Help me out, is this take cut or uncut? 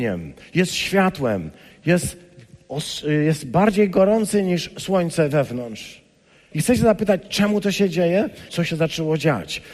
cut